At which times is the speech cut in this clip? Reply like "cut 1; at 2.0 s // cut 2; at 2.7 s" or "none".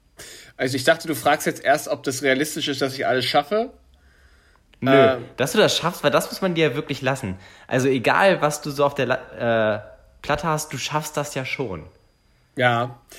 none